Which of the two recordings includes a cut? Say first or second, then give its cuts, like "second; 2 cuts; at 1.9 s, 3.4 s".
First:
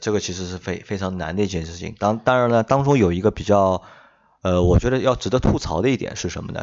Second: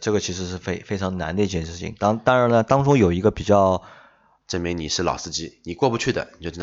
second; 1 cut; at 4.4 s